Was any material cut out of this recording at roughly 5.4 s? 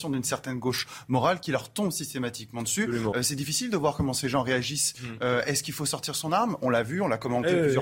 no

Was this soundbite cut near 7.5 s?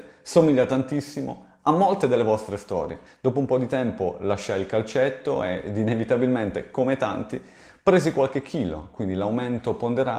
no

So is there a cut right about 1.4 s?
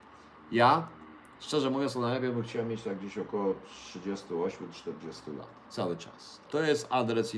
no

